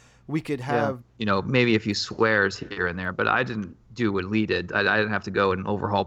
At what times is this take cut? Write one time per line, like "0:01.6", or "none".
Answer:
0:01.0
0:03.8